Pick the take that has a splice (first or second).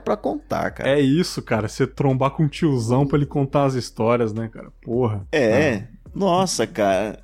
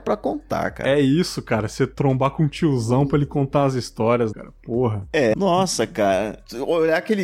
second